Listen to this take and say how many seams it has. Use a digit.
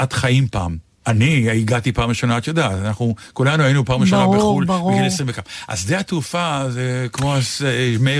1